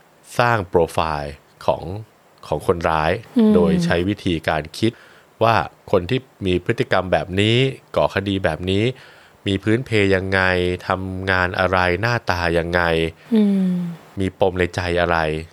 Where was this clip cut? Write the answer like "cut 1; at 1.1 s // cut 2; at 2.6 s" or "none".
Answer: none